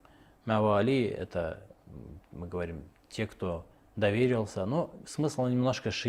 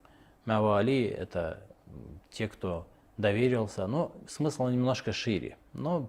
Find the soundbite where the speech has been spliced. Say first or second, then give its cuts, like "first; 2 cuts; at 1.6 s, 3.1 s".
second; 1 cut; at 2.2 s